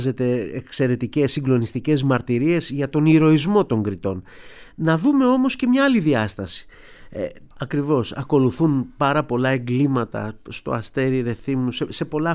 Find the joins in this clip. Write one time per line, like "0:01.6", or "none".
0:07.5